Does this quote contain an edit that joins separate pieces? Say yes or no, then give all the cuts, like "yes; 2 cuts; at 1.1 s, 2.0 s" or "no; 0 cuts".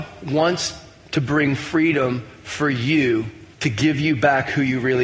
yes; 1 cut; at 3.5 s